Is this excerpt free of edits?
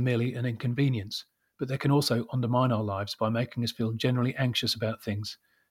yes; 0 cuts

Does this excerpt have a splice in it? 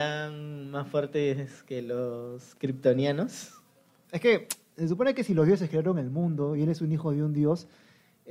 yes; 1 cut; at 4.0 s

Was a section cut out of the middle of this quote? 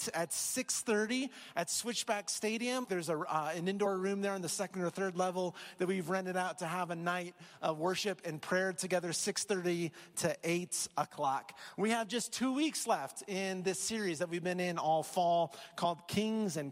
yes; 1 cut; at 2.8 s

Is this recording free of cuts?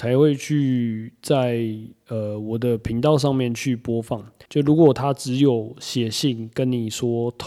no; 1 cut; at 4.5 s

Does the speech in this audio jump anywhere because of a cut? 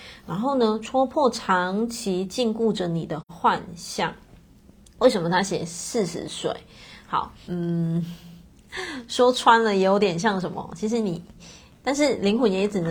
yes; 2 cuts; at 7.5 s, 11.8 s

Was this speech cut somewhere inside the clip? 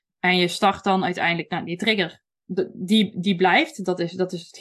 no; 0 cuts

